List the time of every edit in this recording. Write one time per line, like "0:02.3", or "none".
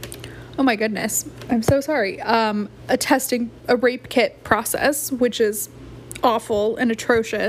0:03.6